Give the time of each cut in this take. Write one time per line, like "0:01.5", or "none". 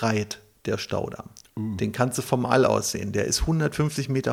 none